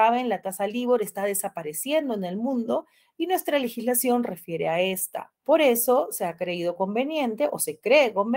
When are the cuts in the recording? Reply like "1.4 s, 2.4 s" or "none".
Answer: none